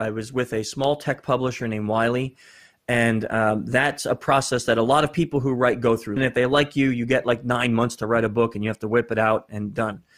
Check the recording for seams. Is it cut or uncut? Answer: cut